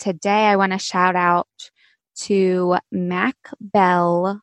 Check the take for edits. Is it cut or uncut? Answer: uncut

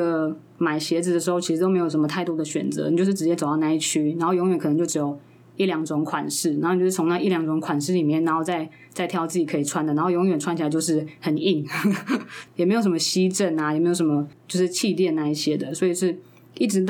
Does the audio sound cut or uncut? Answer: uncut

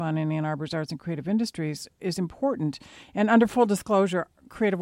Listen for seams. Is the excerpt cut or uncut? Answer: uncut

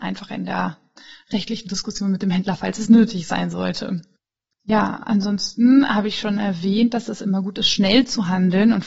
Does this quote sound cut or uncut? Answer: uncut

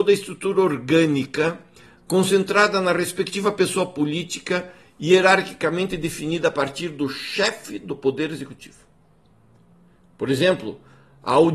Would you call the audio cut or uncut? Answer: uncut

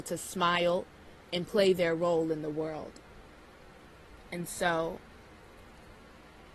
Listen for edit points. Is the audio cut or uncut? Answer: cut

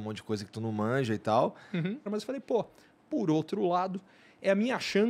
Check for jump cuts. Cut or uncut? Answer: cut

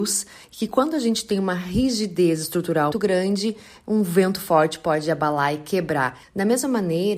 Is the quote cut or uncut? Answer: cut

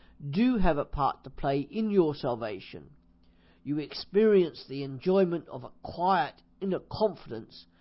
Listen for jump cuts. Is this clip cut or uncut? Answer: uncut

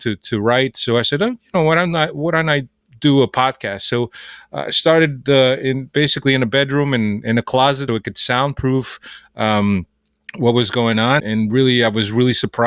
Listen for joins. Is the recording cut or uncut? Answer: cut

